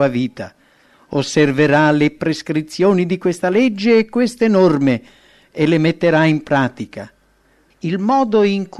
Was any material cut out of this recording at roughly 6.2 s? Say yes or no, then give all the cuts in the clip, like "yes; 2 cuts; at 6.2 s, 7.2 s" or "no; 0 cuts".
no; 2 cuts; at 0.9 s, 7.7 s